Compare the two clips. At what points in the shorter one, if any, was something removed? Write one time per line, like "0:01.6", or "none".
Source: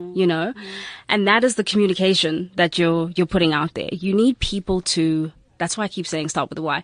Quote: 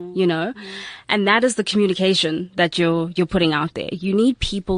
none